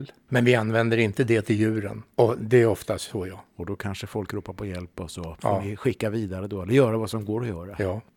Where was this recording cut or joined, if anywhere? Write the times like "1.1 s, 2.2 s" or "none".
2.1 s